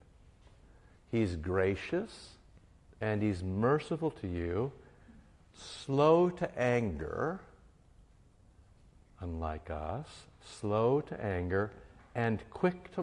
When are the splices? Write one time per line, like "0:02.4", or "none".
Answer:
none